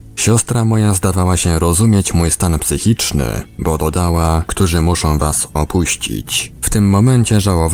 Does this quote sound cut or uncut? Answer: cut